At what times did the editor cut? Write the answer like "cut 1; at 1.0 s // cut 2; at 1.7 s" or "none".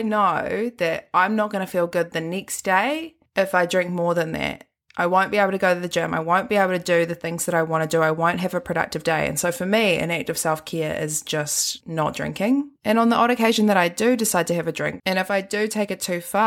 cut 1; at 15.0 s